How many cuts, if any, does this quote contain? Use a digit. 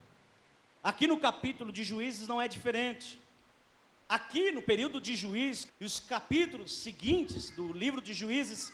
2